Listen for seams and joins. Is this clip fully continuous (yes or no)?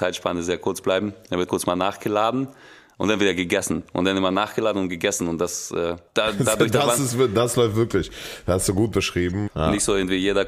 no